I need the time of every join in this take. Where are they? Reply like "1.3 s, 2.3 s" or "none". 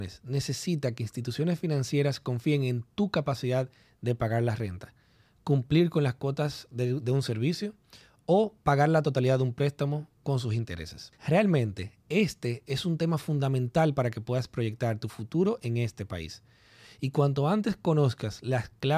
11.2 s